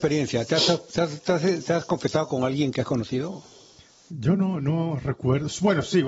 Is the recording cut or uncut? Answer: uncut